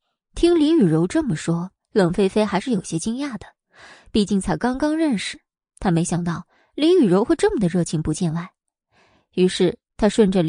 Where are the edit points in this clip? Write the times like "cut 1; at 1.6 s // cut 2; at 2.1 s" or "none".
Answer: none